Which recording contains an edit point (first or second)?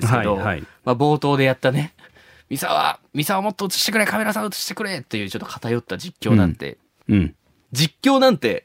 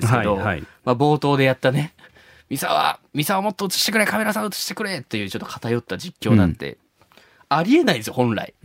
first